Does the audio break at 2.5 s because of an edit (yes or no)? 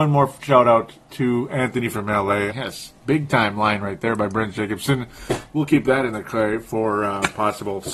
yes